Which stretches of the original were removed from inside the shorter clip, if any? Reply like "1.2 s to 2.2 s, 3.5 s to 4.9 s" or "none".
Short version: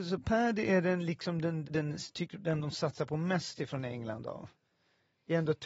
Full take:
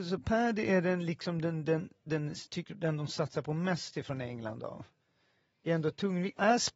1.6 s to 2.0 s